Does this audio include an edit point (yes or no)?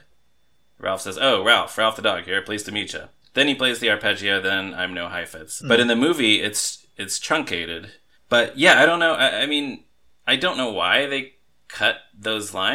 yes